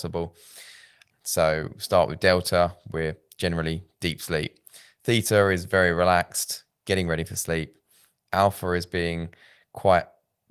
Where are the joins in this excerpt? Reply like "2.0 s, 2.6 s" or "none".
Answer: 1.1 s